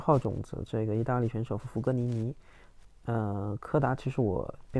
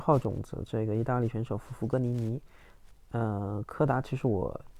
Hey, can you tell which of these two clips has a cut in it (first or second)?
first